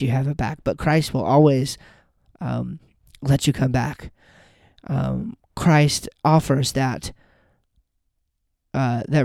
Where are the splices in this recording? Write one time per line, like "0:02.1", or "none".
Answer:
none